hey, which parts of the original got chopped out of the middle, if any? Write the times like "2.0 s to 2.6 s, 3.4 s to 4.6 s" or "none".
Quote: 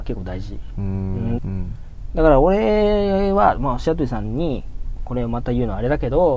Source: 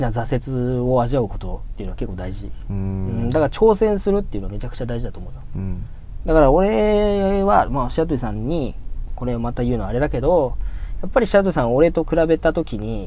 3.3 s to 5.5 s